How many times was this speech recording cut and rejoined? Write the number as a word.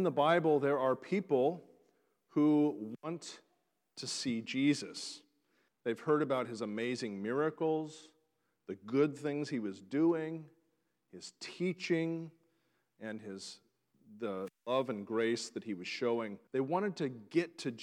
two